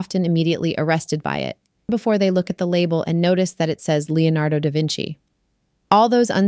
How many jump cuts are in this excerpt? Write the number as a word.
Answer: one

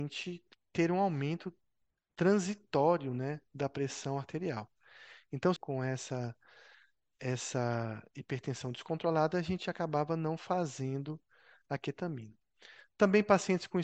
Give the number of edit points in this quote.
one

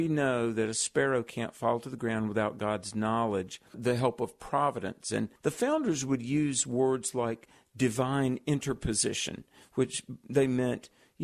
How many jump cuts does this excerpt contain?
two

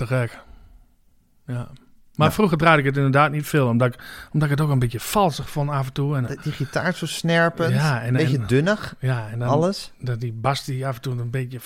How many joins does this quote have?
one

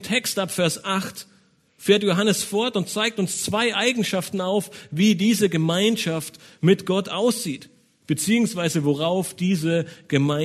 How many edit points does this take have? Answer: zero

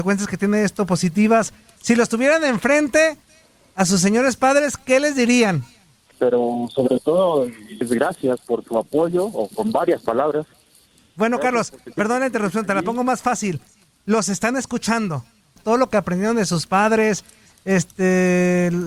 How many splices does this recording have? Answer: three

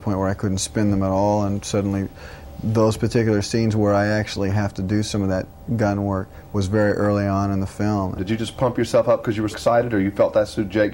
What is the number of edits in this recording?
two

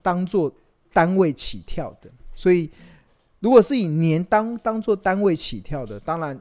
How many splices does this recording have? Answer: zero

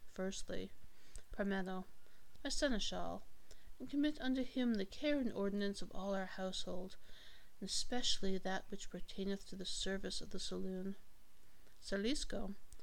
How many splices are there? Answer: one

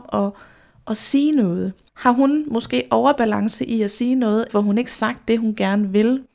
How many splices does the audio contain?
two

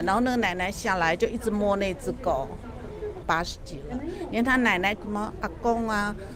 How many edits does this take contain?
two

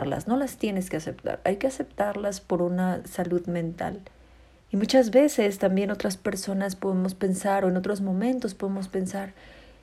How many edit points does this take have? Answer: one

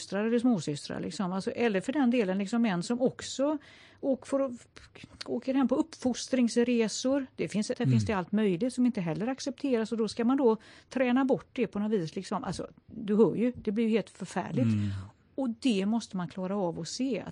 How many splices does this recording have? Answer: one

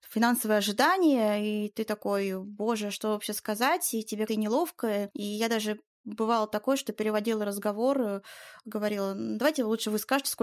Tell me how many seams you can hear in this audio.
one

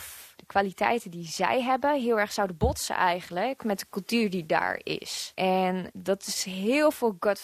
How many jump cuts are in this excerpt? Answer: one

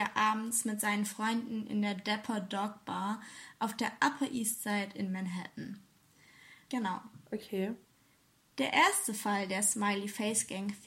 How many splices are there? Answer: one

